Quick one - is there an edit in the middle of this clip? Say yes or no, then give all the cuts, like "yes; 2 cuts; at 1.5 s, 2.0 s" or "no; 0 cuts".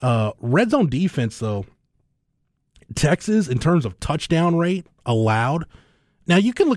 no; 0 cuts